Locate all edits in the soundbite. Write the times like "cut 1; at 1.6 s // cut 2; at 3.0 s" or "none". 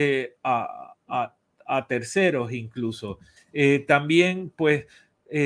cut 1; at 3.4 s